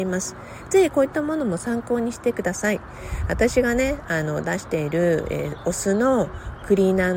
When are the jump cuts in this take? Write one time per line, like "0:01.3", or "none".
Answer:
none